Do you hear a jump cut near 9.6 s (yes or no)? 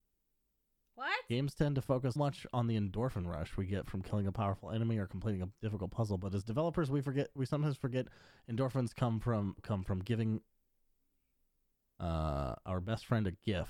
yes